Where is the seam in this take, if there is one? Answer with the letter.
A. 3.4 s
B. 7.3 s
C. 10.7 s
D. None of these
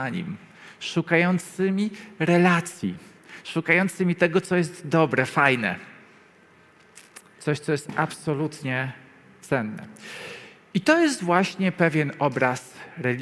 B